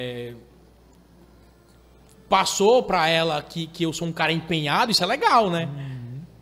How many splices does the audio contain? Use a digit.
0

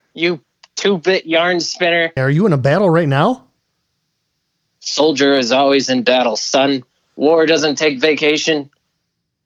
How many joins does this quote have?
1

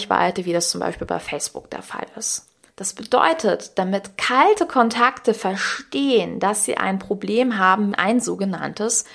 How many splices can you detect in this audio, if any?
2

